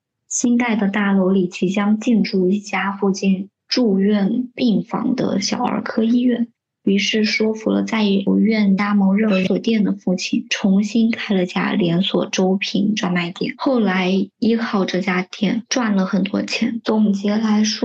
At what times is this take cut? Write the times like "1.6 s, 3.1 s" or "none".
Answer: none